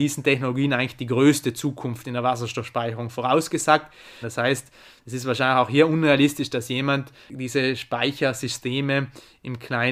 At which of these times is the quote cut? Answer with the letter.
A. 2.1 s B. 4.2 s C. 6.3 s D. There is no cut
B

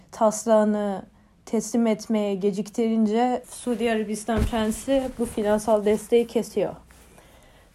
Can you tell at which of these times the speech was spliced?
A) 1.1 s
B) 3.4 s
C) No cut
B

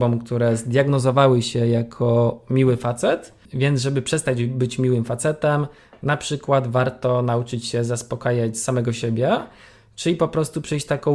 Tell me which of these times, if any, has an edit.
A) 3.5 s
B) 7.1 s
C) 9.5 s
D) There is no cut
A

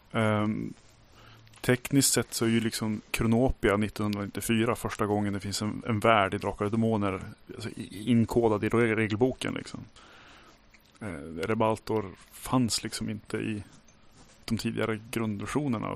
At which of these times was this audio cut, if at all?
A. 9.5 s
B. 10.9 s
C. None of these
C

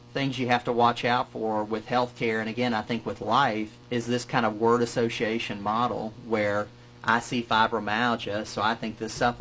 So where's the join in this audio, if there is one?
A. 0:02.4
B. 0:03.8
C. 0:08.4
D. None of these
B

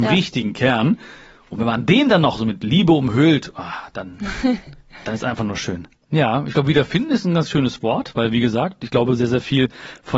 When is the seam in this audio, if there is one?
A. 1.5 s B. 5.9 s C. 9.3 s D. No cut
B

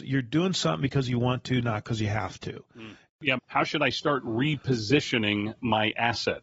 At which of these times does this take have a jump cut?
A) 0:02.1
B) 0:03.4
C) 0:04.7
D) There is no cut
B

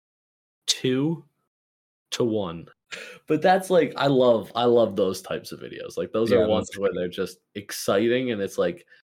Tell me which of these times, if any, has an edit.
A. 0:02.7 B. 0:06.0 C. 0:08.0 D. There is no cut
A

